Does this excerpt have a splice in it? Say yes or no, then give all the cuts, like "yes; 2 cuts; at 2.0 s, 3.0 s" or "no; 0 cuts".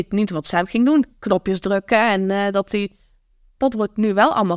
no; 0 cuts